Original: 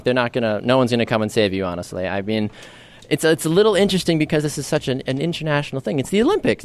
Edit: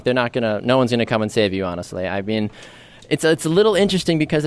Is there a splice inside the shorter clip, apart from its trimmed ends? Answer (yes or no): no